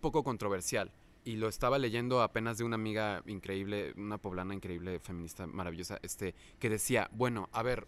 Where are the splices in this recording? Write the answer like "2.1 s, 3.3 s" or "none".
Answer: none